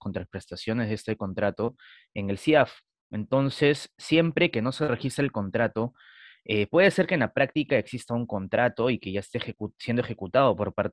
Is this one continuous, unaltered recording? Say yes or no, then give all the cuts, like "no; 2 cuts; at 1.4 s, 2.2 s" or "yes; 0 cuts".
yes; 0 cuts